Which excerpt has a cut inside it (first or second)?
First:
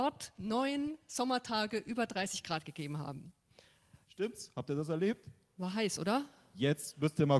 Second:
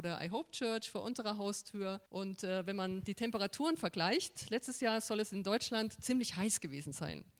second